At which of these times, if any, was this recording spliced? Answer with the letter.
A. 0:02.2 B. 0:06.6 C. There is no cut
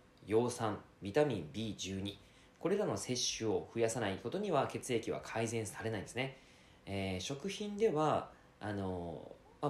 C